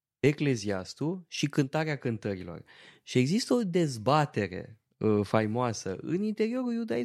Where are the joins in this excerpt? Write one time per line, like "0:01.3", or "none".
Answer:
none